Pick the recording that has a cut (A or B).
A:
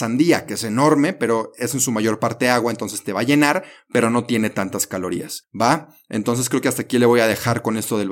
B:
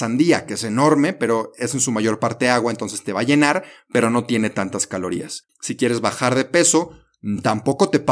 B